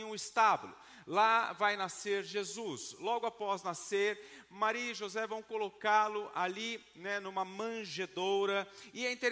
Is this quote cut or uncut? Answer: uncut